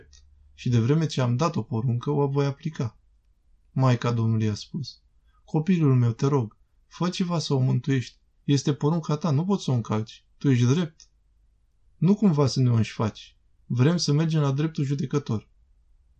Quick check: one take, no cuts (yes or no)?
no